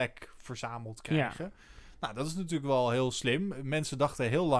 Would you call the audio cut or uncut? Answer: uncut